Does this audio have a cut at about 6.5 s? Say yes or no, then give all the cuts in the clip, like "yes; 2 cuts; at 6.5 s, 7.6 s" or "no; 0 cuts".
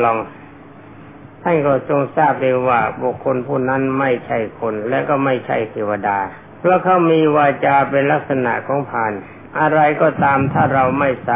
yes; 1 cut; at 6.5 s